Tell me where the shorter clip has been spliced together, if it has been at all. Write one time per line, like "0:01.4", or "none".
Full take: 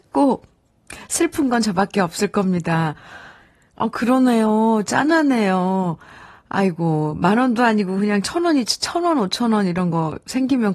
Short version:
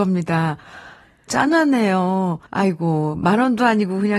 0:01.3
0:02.5